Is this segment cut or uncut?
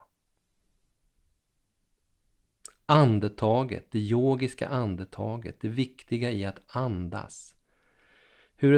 uncut